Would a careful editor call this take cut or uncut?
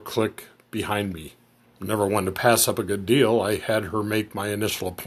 cut